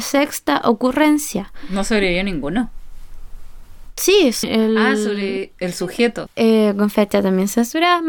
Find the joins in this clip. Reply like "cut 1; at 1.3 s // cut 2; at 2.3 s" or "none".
cut 1; at 4.4 s // cut 2; at 6.3 s